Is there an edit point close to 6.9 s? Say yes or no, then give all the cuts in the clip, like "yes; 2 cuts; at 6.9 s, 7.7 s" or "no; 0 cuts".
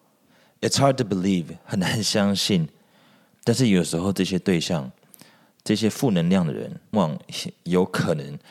yes; 1 cut; at 6.9 s